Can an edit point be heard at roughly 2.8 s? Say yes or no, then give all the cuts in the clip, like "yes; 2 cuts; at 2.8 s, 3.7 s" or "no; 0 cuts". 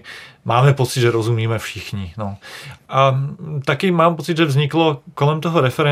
yes; 1 cut; at 2.8 s